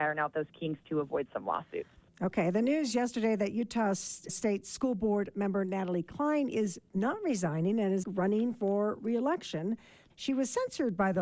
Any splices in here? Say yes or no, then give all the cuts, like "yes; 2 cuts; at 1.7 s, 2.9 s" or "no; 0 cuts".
yes; 3 cuts; at 4.3 s, 8.0 s, 10.1 s